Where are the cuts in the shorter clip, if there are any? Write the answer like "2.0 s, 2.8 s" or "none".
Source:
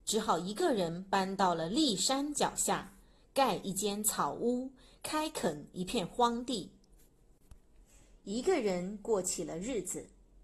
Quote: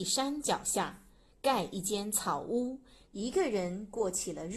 3.1 s